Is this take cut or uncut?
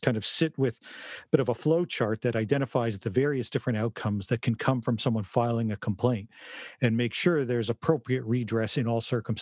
uncut